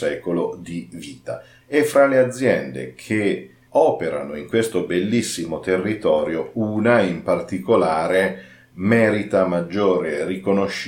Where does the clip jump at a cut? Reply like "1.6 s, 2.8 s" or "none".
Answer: 1.6 s